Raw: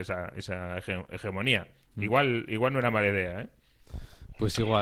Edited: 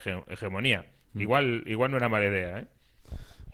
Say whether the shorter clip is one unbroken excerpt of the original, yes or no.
yes